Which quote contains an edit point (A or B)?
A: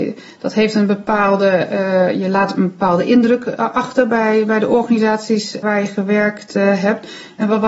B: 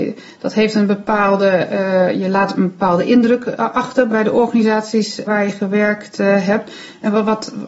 B